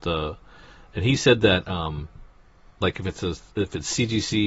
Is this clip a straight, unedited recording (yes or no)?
yes